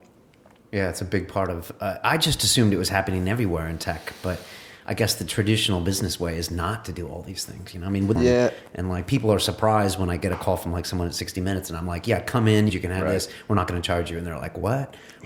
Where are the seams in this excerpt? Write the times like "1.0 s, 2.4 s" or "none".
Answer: 8.2 s, 12.7 s